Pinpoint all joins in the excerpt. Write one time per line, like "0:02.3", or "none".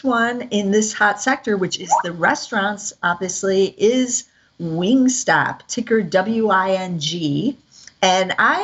none

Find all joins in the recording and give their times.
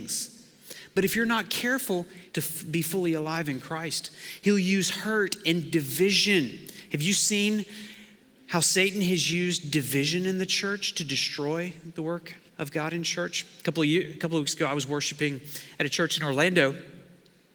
0:02.3
0:12.5

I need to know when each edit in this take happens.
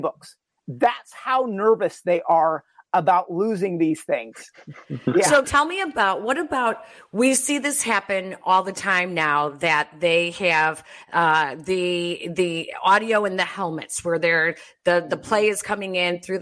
0:05.4

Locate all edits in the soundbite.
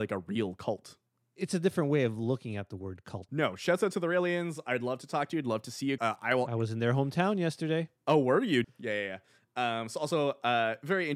0:03.3
0:06.0
0:08.6

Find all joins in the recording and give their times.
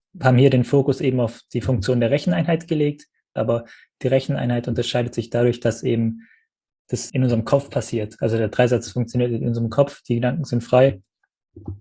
0:03.4
0:07.1

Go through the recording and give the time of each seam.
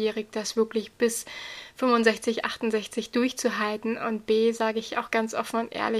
none

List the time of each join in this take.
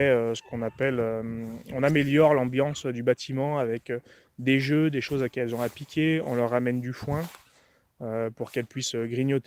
none

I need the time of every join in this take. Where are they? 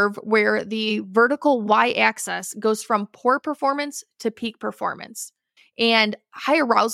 0:05.6

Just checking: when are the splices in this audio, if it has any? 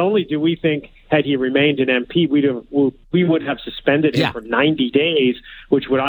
none

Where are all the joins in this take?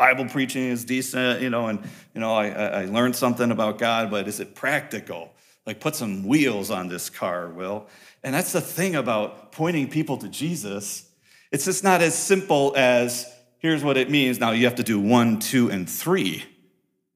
none

